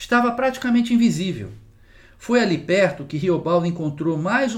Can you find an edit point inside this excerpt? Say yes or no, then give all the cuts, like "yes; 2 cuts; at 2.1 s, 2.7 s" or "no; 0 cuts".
no; 0 cuts